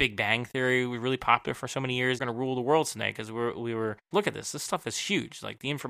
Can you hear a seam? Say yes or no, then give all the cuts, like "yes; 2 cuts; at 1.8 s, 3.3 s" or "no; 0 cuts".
yes; 2 cuts; at 2.2 s, 4.1 s